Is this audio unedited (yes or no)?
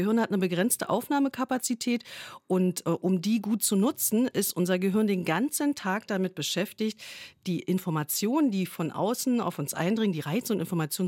yes